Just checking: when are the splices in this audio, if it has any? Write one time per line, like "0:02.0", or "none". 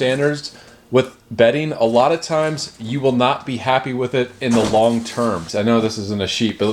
0:05.5